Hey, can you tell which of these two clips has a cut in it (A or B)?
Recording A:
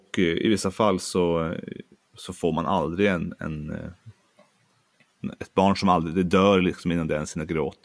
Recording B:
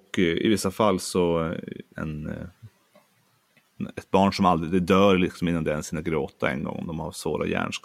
B